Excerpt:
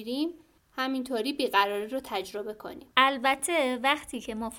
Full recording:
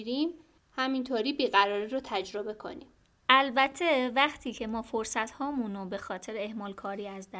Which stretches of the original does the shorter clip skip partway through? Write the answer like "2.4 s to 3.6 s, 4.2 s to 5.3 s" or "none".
2.9 s to 3.2 s

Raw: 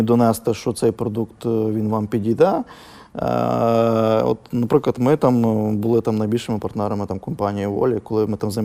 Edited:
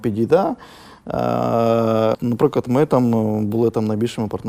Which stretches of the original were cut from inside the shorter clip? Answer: 4.2 s to 4.5 s

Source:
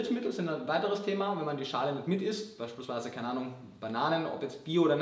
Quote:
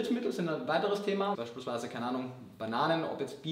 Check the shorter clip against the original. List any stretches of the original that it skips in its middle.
1.3 s to 2.6 s

